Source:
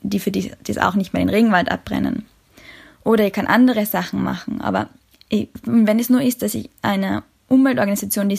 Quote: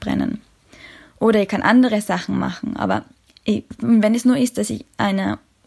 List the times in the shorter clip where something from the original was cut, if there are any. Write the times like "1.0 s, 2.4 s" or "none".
none